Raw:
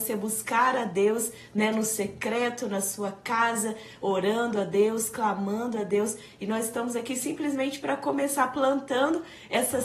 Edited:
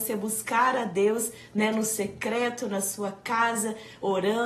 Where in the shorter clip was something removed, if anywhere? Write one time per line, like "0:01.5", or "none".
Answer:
none